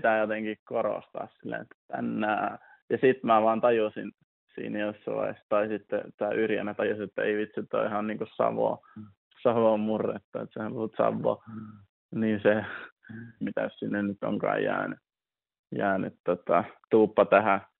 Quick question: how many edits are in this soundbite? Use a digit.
1